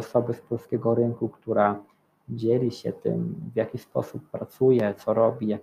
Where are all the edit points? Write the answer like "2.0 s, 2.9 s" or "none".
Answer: none